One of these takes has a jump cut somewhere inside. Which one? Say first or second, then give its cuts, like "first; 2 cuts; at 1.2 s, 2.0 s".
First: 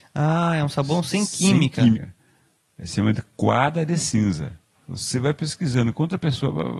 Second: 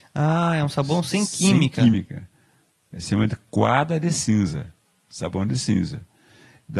first; 2 cuts; at 1.9 s, 4.7 s